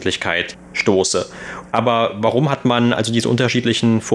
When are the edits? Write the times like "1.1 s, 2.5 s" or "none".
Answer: 1.7 s